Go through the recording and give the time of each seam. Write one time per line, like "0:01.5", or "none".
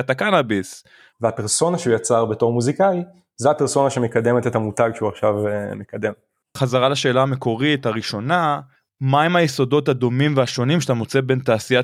0:01.1